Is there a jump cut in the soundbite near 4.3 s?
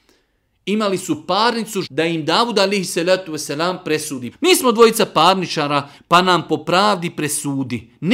yes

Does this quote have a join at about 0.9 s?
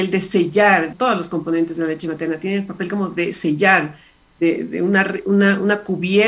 yes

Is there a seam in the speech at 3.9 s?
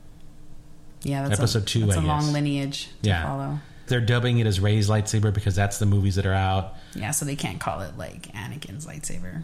yes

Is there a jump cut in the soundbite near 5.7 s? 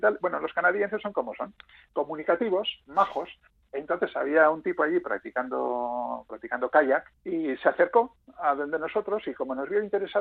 no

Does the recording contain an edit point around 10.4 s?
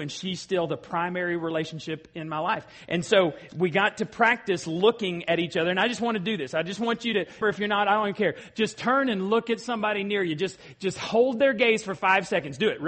no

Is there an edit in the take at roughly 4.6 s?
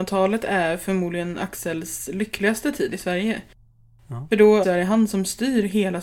yes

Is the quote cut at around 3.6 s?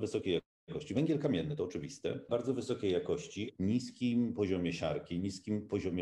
yes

